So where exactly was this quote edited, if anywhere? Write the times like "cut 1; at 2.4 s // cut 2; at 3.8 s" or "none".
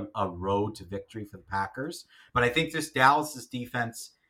cut 1; at 2.3 s